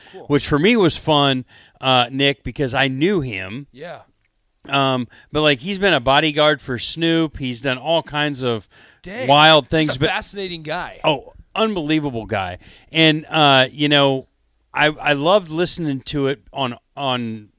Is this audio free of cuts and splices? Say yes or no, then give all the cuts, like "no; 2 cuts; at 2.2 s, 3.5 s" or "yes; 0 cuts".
yes; 0 cuts